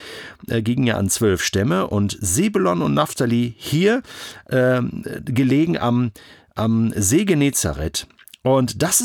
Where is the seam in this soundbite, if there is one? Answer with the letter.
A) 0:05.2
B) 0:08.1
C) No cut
C